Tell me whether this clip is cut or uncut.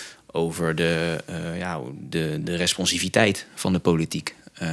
cut